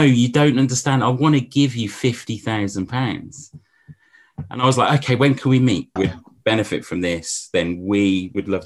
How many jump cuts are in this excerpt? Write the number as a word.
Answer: one